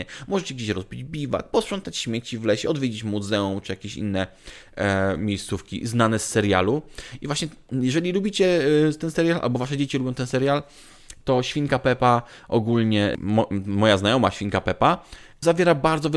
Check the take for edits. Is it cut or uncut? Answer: uncut